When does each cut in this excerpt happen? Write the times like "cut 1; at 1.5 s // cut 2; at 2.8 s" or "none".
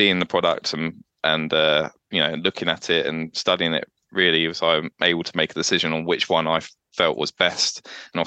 cut 1; at 2.0 s

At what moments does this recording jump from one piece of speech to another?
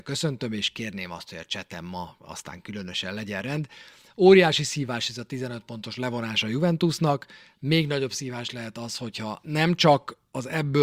none

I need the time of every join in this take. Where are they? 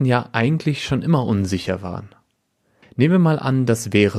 cut 1; at 2.8 s

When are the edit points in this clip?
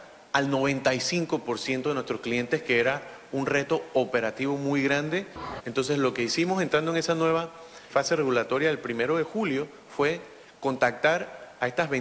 cut 1; at 5.6 s // cut 2; at 7.9 s

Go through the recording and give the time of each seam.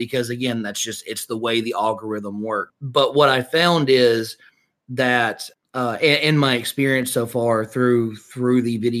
none

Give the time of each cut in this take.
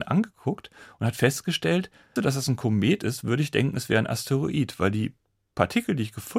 cut 1; at 2.2 s

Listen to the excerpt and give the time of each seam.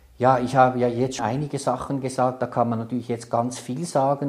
cut 1; at 1.2 s

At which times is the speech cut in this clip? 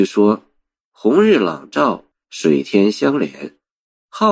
cut 1; at 2.1 s

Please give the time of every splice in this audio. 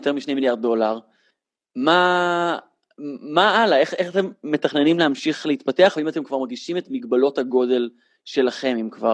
none

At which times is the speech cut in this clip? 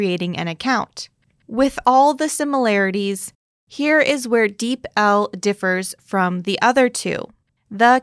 cut 1; at 1.5 s

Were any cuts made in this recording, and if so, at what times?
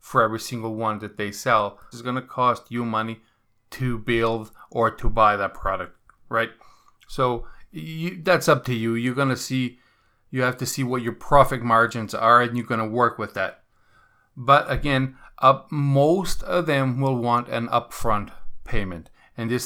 cut 1; at 1.9 s

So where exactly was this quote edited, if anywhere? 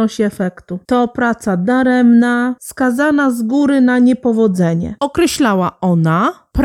cut 1; at 2.6 s // cut 2; at 5.0 s

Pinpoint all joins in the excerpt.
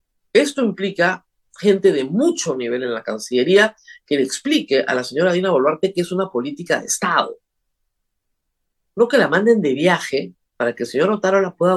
none

